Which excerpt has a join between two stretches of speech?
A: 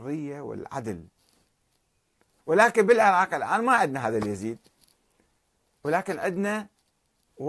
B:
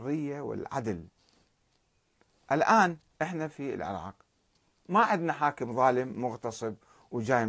A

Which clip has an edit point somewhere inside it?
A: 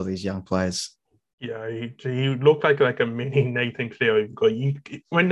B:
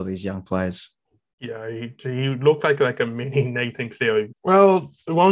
B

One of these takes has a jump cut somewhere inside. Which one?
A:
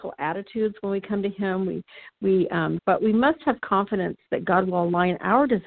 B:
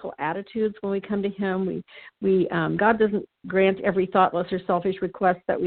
A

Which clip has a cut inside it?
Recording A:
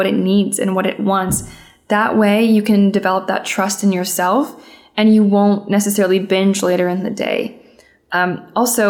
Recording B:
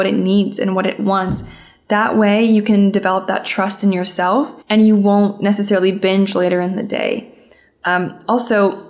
B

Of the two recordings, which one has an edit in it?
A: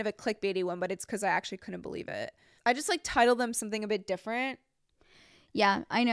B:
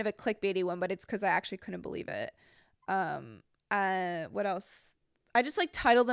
A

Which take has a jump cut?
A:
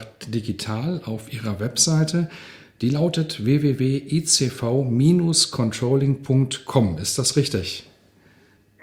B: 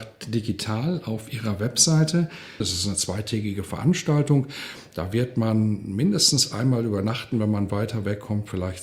B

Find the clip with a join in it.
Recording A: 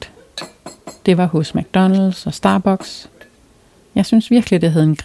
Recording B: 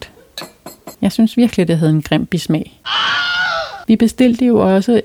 B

